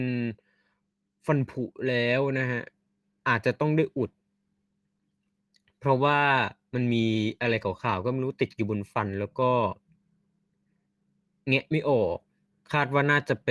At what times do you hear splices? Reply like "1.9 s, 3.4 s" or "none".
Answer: none